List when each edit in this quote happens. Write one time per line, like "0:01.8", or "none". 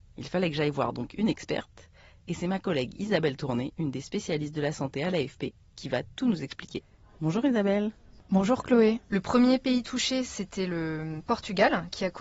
0:09.1